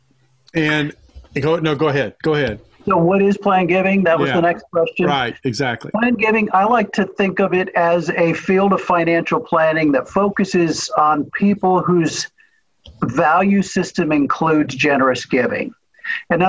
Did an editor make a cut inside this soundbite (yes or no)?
no